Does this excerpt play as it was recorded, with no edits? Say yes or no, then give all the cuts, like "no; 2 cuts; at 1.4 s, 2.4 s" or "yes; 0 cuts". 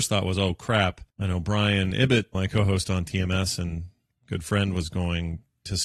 no; 2 cuts; at 1.1 s, 2.3 s